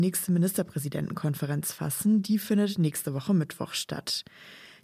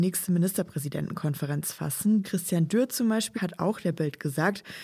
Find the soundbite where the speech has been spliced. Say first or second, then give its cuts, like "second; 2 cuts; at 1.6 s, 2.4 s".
second; 2 cuts; at 2.2 s, 3.3 s